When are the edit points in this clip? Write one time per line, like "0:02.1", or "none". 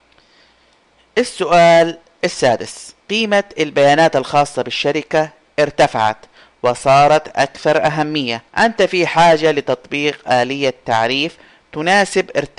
0:03.0
0:08.5